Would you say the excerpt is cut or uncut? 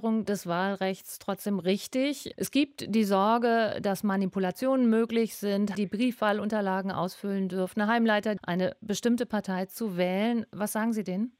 cut